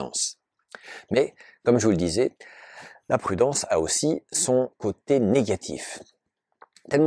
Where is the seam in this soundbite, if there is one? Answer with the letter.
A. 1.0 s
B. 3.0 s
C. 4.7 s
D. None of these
C